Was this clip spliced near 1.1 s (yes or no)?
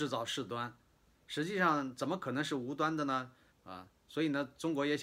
no